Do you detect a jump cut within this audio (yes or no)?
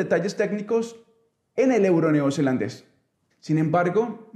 yes